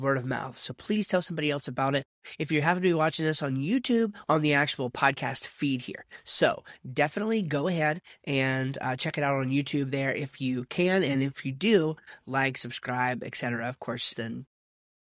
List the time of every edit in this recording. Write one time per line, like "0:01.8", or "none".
0:04.2
0:14.1